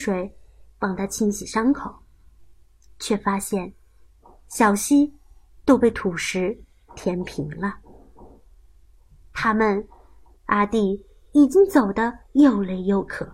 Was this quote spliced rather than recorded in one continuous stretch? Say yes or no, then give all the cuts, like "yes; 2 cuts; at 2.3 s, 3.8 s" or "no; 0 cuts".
yes; 1 cut; at 10.4 s